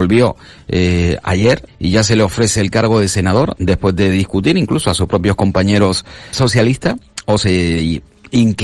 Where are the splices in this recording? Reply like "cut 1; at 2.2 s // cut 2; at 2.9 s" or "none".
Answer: cut 1; at 1.7 s // cut 2; at 6.3 s